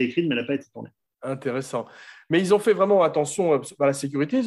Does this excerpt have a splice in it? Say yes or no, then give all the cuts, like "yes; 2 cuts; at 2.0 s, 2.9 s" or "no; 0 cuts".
no; 0 cuts